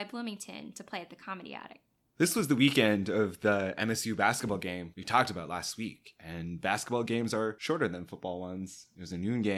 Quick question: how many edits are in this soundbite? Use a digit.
0